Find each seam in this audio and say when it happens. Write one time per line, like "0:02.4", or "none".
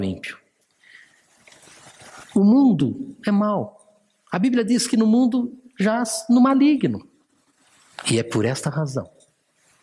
0:02.2
0:08.0

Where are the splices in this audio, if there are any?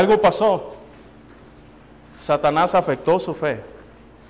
none

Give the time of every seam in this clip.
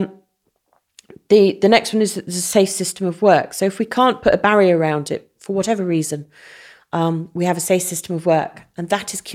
none

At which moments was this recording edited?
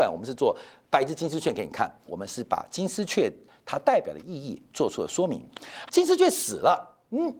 0:02.1
0:05.9

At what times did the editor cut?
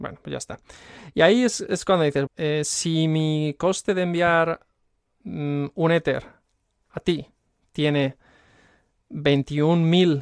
0:02.3

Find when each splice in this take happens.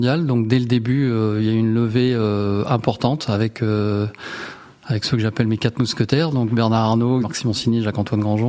0:07.2

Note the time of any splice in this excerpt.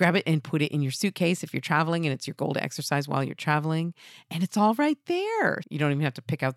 0:05.6

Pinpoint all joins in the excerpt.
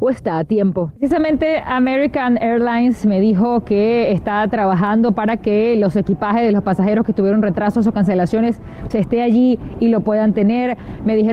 0:01.0
0:08.9

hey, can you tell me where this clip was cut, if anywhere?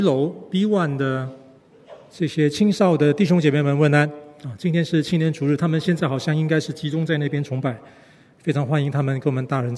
none

